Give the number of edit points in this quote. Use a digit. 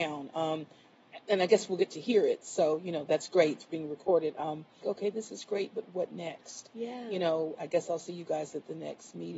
2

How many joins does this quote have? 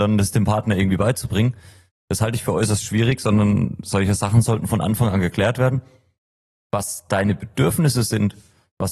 0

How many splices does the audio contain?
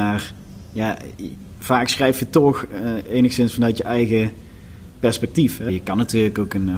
1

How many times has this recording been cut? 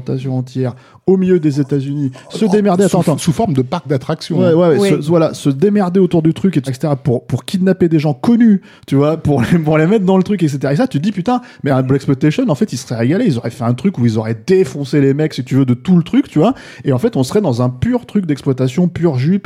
1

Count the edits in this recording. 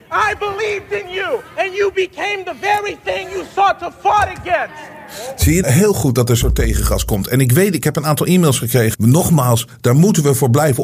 2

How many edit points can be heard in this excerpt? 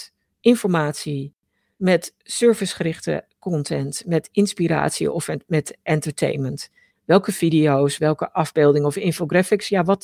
2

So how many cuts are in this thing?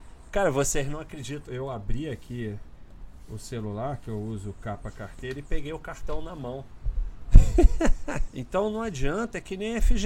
2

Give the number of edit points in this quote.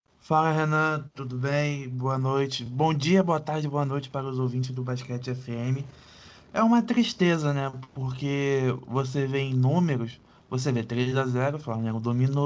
0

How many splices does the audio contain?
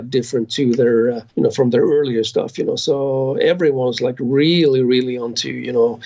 1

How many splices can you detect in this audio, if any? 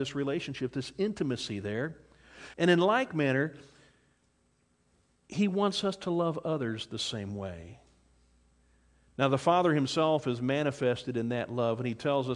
1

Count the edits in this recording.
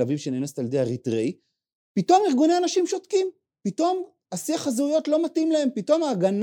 0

